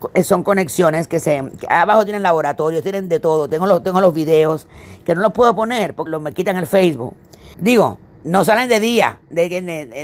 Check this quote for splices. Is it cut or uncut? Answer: cut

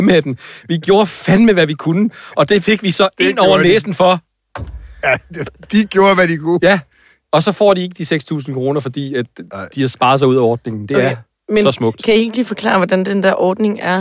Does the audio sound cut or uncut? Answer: uncut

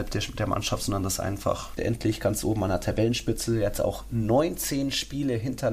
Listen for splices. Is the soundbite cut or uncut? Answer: cut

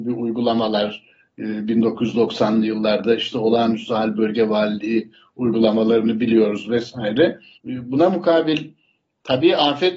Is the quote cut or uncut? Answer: cut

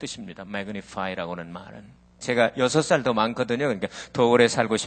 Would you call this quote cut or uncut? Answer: cut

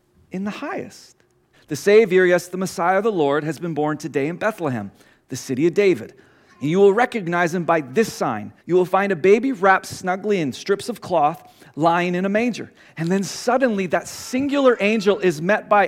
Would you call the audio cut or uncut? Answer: cut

